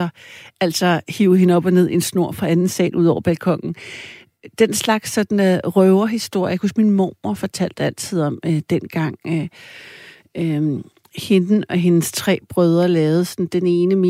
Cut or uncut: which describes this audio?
uncut